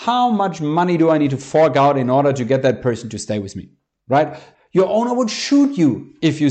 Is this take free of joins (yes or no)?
no